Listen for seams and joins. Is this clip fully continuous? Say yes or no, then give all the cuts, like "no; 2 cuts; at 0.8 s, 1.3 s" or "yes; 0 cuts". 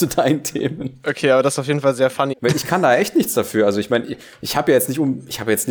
no; 1 cut; at 2.3 s